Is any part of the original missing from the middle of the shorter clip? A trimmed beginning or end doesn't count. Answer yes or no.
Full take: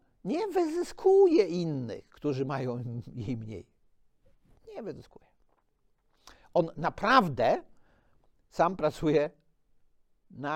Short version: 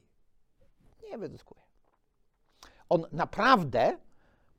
no